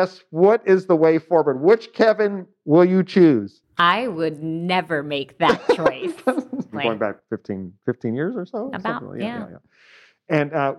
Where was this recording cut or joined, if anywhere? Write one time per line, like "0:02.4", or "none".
0:06.7